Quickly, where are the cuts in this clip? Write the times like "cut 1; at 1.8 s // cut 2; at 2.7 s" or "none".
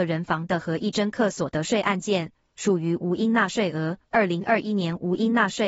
cut 1; at 4.0 s